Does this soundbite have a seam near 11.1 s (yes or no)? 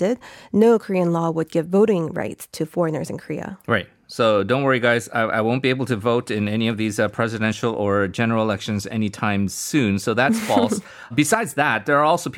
yes